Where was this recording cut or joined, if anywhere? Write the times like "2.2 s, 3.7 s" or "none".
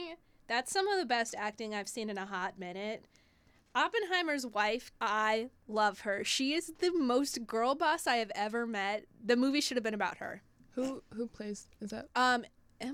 4.9 s